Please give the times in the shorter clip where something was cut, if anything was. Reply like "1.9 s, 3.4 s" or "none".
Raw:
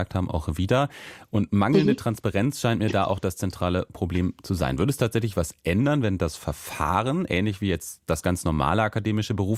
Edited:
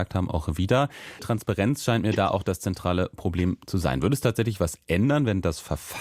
1.2 s